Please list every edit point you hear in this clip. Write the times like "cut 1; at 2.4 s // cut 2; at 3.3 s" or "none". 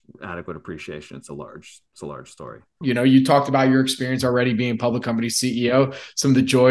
cut 1; at 2.8 s